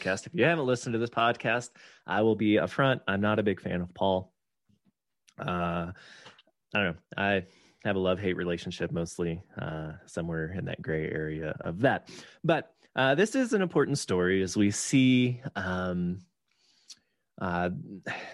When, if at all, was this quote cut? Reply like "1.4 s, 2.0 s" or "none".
11.5 s